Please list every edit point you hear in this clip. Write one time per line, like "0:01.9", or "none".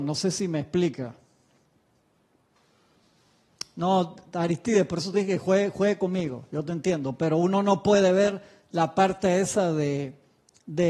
none